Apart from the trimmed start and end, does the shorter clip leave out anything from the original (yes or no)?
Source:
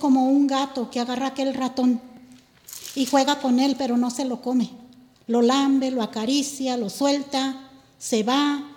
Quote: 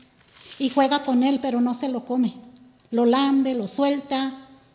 yes